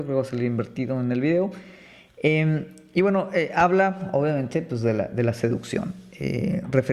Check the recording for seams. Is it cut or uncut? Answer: uncut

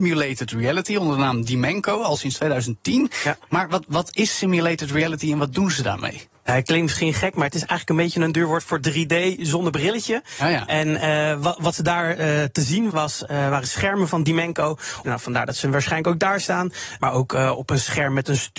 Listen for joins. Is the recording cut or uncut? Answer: cut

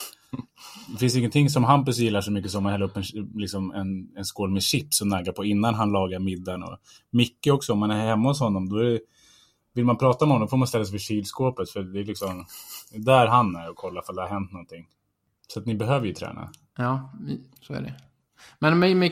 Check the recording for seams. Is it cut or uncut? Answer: uncut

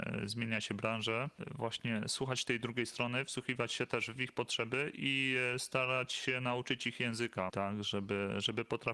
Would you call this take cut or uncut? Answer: cut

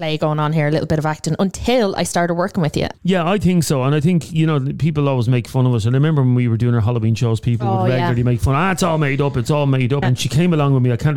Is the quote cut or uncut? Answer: cut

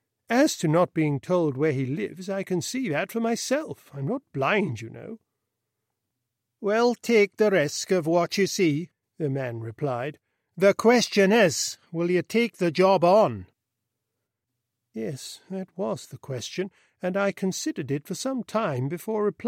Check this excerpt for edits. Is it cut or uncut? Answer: uncut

